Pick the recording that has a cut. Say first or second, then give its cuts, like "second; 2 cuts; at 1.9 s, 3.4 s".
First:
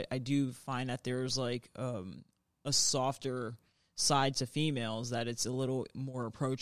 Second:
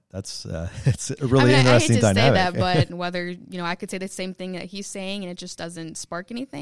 second; 1 cut; at 2.9 s